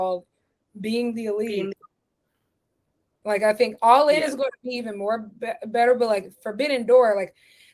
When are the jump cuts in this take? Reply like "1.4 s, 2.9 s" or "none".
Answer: 3.2 s